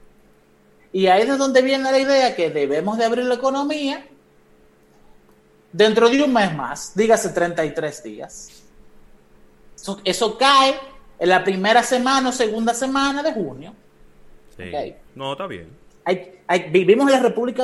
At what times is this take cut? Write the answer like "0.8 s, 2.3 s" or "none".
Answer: 15.1 s